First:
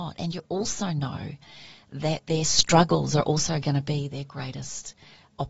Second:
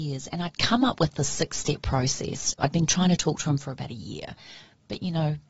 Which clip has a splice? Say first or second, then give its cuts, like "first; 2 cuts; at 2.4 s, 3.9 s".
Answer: second; 1 cut; at 2.6 s